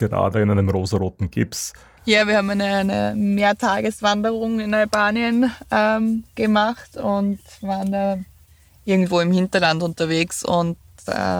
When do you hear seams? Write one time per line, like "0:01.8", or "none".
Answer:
0:02.0